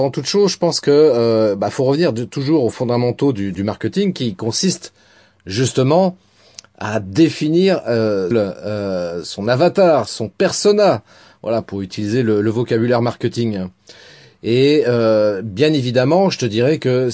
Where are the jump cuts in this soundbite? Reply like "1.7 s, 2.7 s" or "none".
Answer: 8.3 s